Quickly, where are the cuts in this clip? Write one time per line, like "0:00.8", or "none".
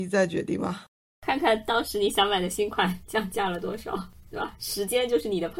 none

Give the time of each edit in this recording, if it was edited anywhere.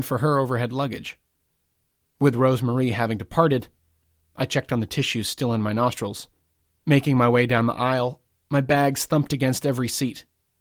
0:06.8

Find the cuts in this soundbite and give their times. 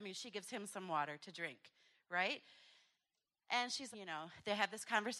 0:03.9

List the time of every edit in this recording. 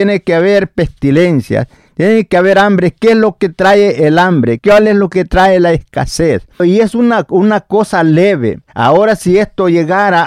0:04.6
0:06.6
0:08.7

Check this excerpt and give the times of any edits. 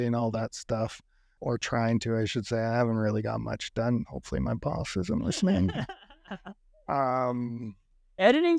0:01.4

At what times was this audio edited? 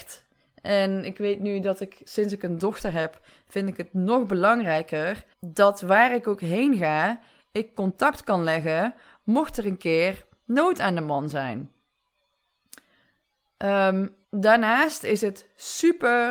0:05.3
0:14.2

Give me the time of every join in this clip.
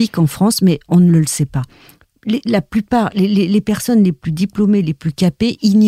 none

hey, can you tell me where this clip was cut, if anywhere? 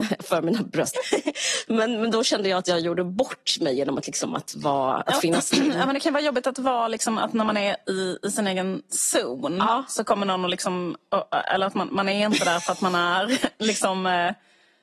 0:00.9

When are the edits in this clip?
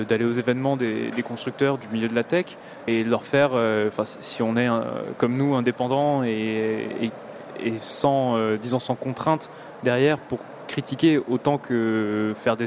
0:02.9

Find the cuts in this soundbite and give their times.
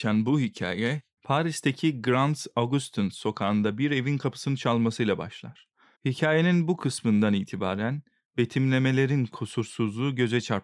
0:01.2
0:05.9

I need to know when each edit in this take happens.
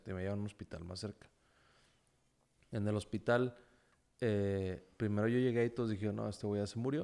none

